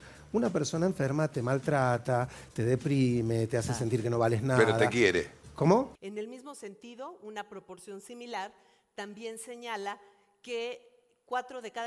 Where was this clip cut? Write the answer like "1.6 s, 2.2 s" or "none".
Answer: 5.9 s